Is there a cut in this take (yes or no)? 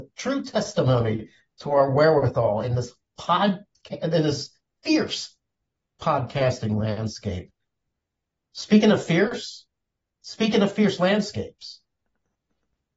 no